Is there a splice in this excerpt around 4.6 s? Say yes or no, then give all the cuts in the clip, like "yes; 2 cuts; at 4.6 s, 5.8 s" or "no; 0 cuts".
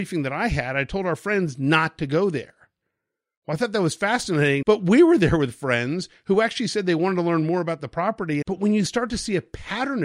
yes; 2 cuts; at 4.6 s, 8.4 s